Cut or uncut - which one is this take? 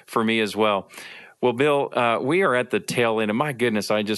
uncut